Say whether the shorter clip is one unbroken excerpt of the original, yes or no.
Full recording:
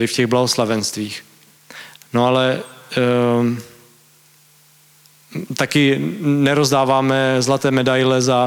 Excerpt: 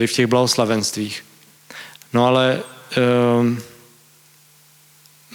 yes